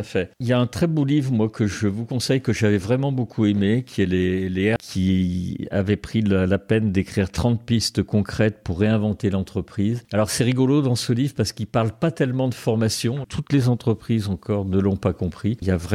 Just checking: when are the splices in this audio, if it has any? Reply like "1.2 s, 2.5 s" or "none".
4.8 s, 13.2 s